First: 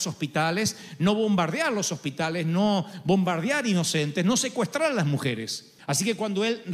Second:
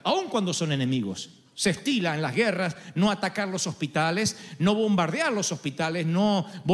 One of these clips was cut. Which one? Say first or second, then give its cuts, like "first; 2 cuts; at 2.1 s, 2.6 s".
first; 1 cut; at 5.8 s